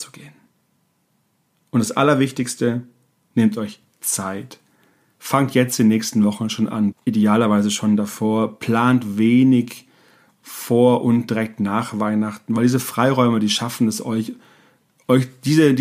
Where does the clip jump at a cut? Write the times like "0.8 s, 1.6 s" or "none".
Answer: 6.9 s